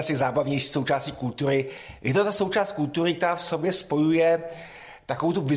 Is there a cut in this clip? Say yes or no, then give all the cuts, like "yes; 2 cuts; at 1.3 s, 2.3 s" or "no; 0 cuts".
no; 0 cuts